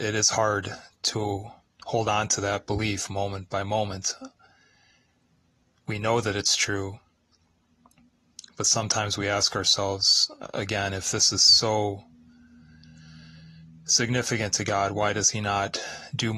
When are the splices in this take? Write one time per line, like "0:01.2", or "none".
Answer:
none

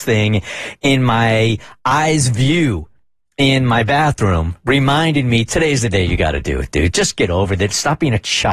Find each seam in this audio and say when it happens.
0:06.9

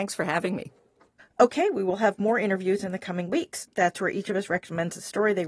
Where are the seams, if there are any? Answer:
0:03.7

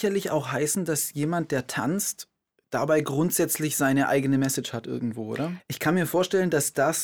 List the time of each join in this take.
0:05.6

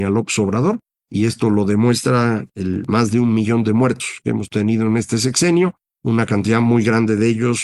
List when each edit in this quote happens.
none

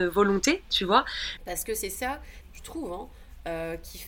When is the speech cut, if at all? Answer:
0:01.4
0:02.4

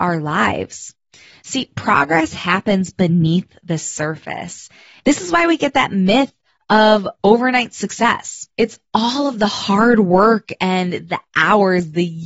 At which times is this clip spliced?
0:05.0
0:08.5

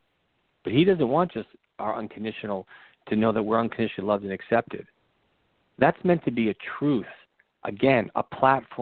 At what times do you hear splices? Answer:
none

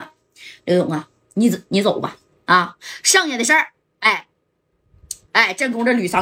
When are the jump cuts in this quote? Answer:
0:05.3

